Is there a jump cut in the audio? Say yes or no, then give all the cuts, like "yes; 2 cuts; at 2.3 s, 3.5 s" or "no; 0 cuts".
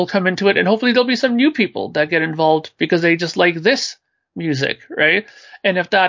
no; 0 cuts